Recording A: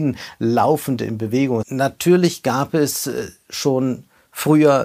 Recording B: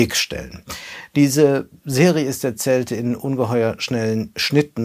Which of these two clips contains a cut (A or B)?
A